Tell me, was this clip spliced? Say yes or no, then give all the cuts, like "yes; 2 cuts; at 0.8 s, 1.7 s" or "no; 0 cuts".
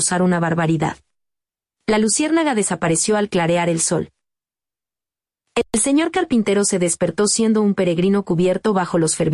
no; 0 cuts